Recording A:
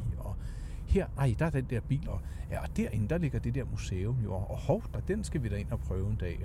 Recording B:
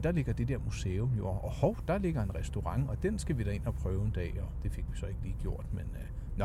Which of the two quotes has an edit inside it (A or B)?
A